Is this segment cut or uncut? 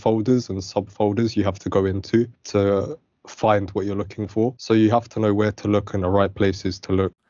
uncut